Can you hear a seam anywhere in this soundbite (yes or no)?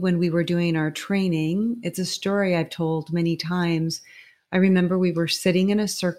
no